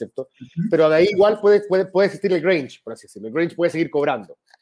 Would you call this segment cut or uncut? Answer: uncut